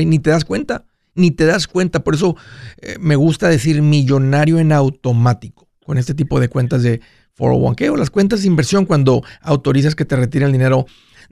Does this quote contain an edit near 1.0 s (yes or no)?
no